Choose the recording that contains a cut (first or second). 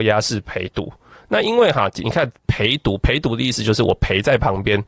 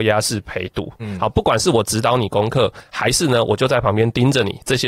second